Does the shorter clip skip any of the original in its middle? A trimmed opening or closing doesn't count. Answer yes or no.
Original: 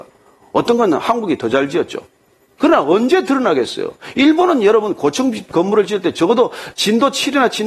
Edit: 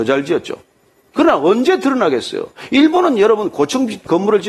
no